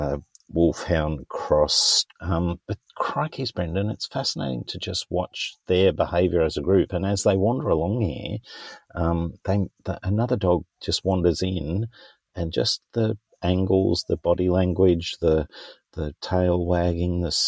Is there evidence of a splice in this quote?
yes; 1 cut; at 2.1 s

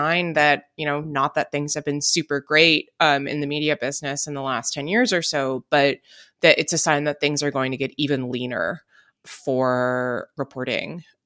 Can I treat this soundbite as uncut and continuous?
yes; 0 cuts

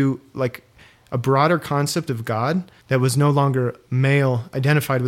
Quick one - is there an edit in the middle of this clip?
yes; 1 cut; at 2.8 s

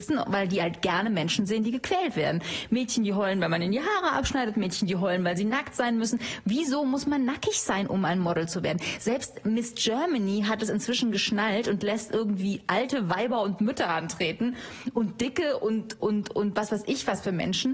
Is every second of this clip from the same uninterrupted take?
yes; 0 cuts

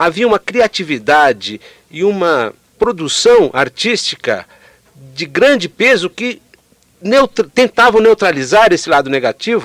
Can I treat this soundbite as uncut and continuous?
yes; 0 cuts

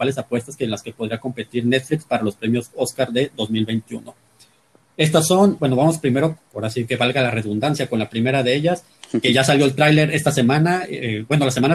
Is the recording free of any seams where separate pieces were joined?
yes; 0 cuts

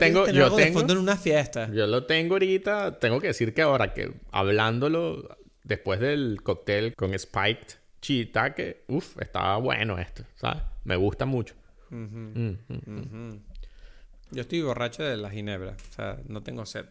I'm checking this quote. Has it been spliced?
yes; 1 cut; at 6.9 s

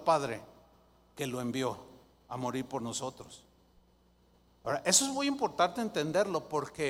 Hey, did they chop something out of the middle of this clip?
no; 0 cuts

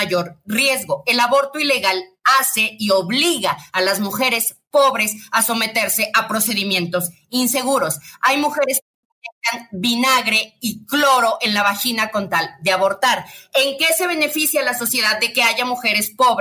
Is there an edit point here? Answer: no; 0 cuts

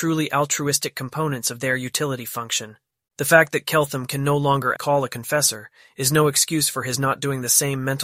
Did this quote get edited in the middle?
yes; 2 cuts; at 3.1 s, 4.8 s

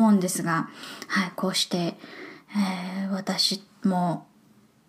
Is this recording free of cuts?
yes; 0 cuts

